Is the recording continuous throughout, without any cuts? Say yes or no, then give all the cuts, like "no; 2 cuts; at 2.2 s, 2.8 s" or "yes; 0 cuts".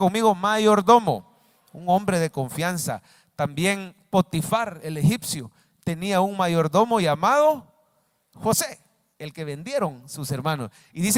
yes; 0 cuts